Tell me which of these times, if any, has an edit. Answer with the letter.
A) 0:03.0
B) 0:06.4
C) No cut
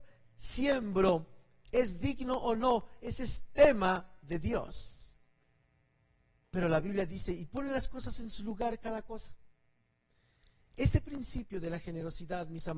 B